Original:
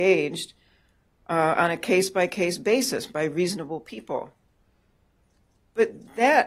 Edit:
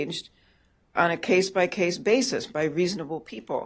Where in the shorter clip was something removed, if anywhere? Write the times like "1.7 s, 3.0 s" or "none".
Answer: 0.9 s